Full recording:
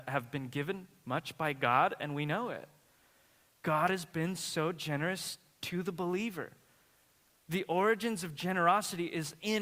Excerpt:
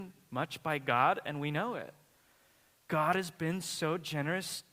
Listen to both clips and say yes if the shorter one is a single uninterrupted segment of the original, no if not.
yes